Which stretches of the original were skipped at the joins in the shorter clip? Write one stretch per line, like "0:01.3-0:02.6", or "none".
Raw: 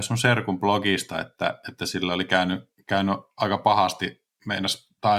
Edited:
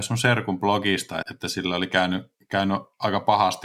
0:01.2-0:01.6